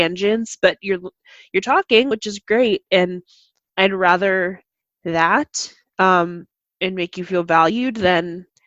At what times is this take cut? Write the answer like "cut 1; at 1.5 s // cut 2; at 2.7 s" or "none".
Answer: none